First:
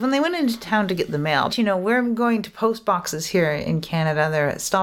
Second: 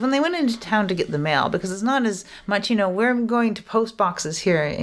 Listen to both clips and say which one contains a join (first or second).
first